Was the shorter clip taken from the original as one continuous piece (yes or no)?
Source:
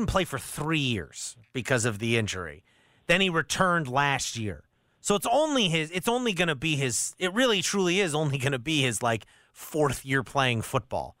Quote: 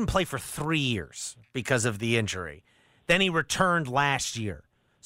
yes